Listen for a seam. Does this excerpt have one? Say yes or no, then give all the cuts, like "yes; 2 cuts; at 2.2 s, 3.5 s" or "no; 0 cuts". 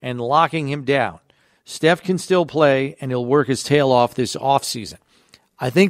no; 0 cuts